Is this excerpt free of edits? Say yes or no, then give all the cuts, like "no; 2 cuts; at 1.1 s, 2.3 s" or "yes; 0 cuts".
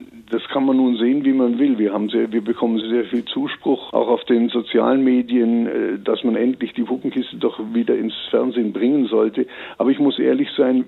no; 1 cut; at 2.8 s